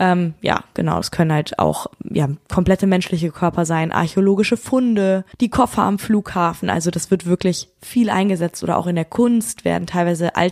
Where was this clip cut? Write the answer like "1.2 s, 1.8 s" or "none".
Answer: 5.3 s